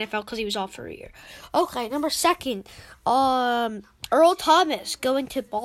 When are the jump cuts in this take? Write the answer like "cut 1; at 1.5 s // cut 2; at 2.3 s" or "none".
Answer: none

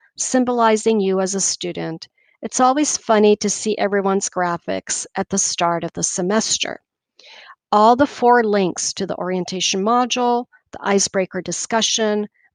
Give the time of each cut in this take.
none

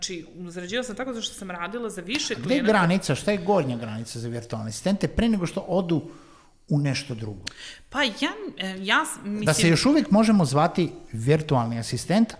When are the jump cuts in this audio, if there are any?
none

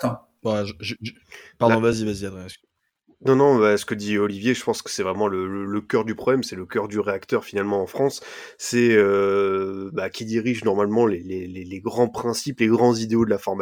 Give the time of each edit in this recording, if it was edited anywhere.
none

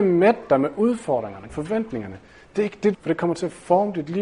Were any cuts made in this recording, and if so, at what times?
cut 1; at 1.5 s // cut 2; at 2.9 s

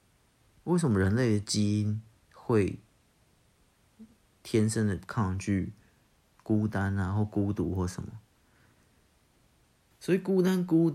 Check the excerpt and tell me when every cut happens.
cut 1; at 9.9 s

